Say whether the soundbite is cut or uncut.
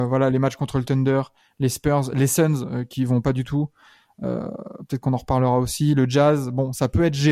uncut